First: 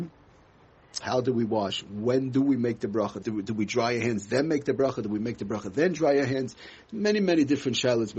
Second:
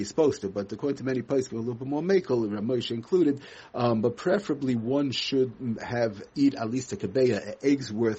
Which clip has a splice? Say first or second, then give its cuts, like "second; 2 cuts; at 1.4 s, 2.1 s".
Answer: first; 2 cuts; at 1.0 s, 3.2 s